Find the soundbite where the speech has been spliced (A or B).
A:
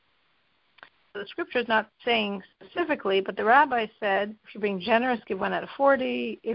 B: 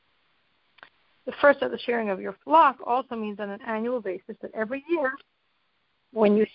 A